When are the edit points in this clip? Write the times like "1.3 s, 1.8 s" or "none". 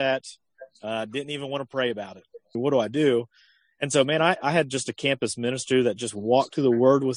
2.5 s